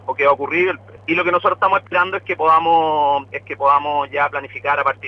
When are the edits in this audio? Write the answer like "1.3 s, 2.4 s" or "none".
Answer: 1.0 s